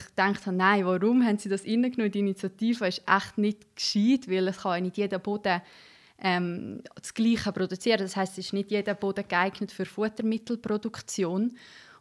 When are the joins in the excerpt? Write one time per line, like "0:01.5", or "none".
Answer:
none